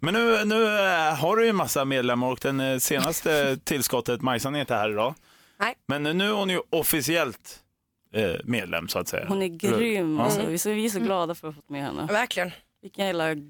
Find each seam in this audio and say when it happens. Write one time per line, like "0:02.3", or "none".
none